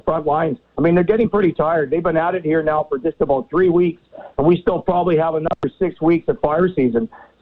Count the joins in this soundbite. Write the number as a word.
zero